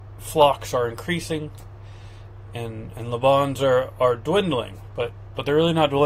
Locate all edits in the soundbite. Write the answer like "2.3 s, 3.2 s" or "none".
2.5 s